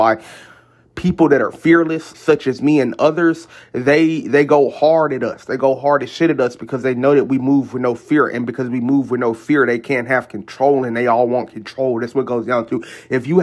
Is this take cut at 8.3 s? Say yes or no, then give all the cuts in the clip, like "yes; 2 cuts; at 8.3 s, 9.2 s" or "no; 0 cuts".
no; 1 cut; at 2.1 s